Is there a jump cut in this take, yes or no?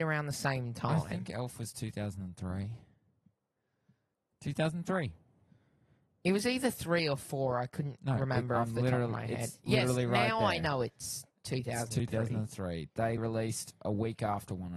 yes